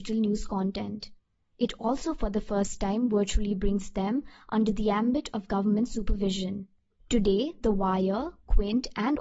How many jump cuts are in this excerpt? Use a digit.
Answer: 0